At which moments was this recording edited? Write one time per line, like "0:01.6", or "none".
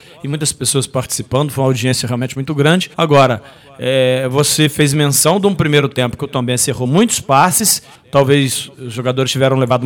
0:02.9
0:08.0